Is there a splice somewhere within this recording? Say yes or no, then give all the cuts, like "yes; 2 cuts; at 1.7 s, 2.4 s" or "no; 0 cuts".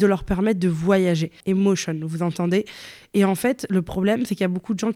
yes; 1 cut; at 1.4 s